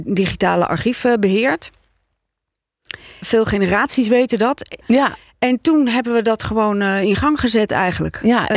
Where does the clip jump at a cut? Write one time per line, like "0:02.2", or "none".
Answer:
0:03.2
0:04.8